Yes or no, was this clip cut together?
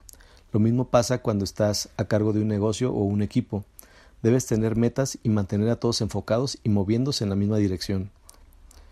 no